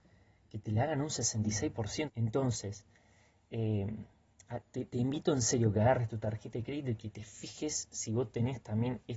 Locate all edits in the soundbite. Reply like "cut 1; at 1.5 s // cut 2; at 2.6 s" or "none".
cut 1; at 2.0 s